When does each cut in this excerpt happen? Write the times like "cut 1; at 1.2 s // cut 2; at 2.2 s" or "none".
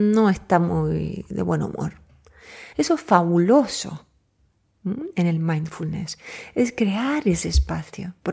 cut 1; at 2.7 s

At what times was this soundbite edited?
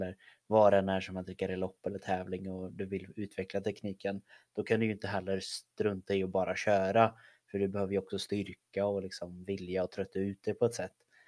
none

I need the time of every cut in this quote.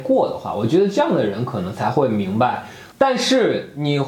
cut 1; at 2.9 s

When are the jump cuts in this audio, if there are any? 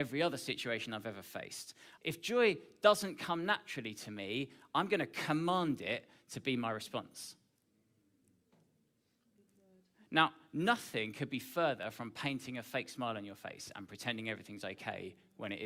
cut 1; at 2.0 s

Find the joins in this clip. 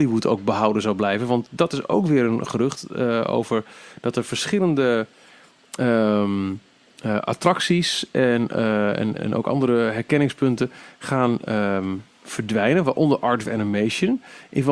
cut 1; at 9.2 s

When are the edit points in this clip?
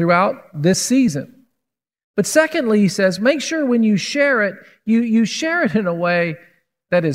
none

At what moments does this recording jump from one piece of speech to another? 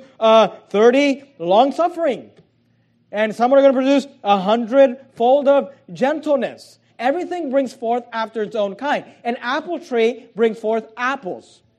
cut 1; at 6.9 s

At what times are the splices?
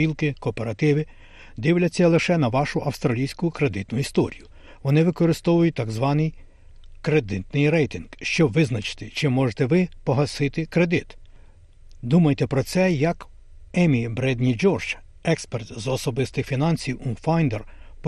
cut 1; at 13.7 s

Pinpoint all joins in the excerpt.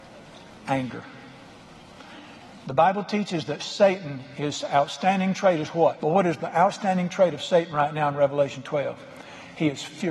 cut 1; at 6.0 s

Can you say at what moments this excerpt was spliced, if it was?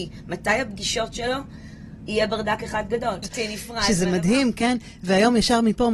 cut 1; at 3.2 s

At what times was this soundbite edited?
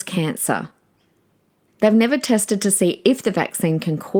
cut 1; at 1.7 s

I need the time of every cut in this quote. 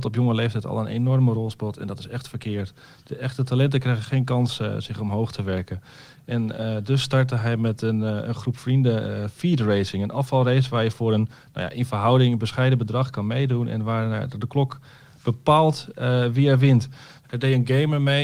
cut 1; at 17.2 s

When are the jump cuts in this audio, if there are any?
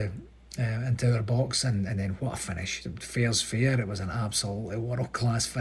none

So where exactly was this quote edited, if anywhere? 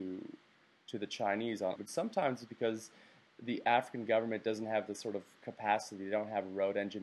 cut 1; at 1.8 s

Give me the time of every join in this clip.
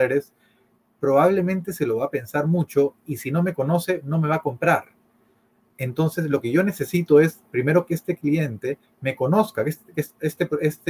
none

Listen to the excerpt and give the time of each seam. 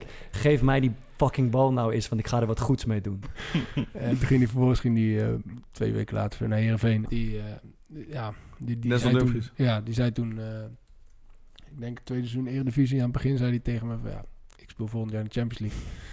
cut 1; at 3.2 s // cut 2; at 7.1 s

